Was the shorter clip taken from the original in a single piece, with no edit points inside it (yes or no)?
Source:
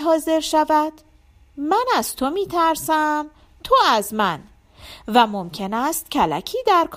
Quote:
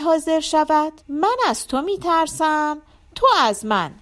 no